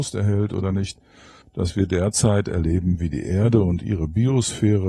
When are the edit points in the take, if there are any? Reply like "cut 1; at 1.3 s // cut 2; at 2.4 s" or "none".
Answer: cut 1; at 1.4 s